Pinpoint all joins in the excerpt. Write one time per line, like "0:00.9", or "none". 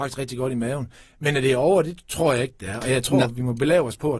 none